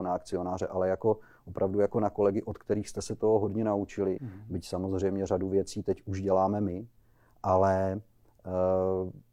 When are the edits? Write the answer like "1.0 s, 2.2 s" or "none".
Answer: 4.2 s